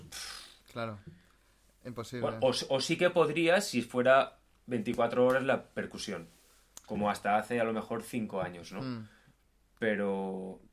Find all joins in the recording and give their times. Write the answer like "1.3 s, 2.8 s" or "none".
none

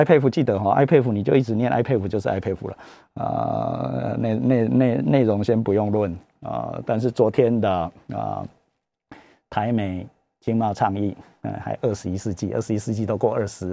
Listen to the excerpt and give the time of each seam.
5.0 s

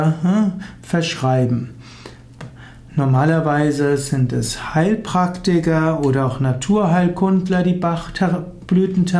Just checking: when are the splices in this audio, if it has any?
none

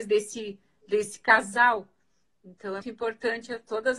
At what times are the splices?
2.8 s

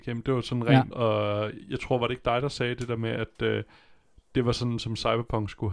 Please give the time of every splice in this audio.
0.9 s

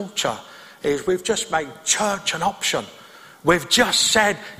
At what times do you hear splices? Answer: none

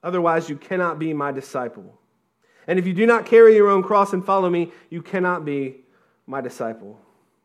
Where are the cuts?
none

